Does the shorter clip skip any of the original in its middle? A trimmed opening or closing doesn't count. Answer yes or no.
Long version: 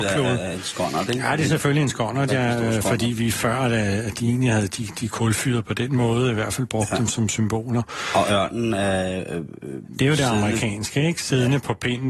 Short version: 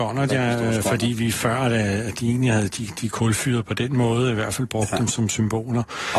no